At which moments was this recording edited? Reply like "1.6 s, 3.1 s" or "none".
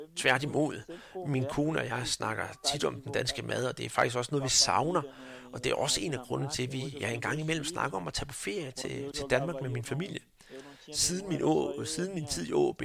none